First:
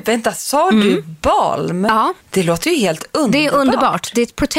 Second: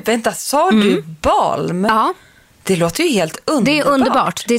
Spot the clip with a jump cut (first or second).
first